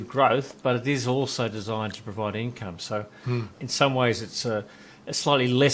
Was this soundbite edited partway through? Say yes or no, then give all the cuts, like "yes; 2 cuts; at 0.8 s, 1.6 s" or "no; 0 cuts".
yes; 1 cut; at 3.5 s